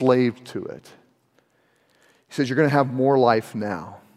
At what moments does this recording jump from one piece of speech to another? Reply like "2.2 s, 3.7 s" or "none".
none